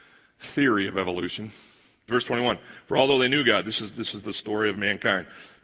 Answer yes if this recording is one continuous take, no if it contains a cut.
no